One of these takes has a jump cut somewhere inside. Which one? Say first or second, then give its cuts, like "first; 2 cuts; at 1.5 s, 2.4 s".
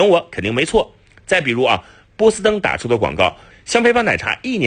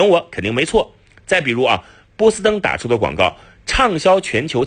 first; 1 cut; at 3.5 s